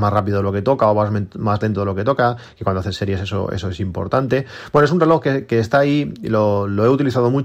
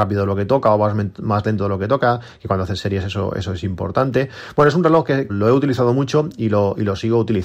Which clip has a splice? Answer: second; 1 cut; at 5.3 s

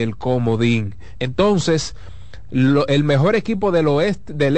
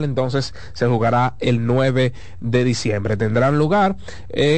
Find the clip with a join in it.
first; 1 cut; at 1.2 s

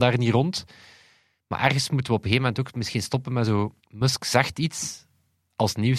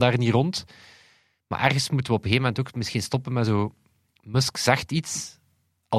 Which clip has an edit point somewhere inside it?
first; 1 cut; at 3.8 s

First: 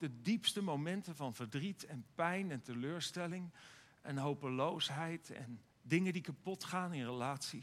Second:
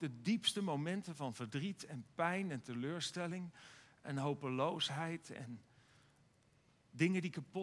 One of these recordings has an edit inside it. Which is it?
first; 1 cut; at 5.7 s

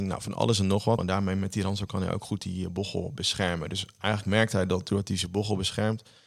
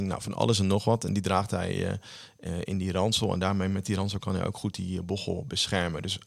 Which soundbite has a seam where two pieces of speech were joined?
first; 1 cut; at 1.0 s

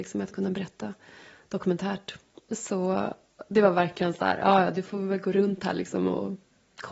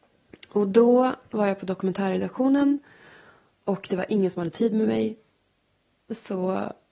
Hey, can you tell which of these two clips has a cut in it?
first; 1 cut; at 2.4 s

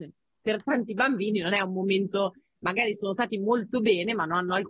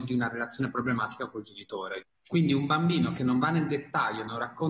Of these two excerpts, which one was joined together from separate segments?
second; 1 cut; at 2.1 s

